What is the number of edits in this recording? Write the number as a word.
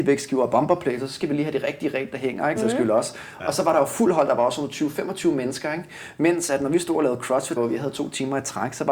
two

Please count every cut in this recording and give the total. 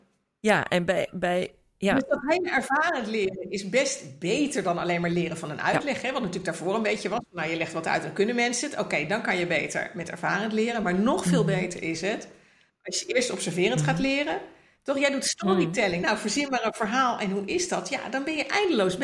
two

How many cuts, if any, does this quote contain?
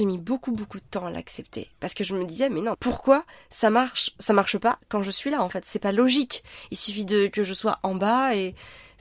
one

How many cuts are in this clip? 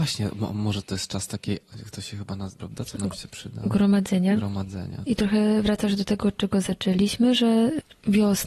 two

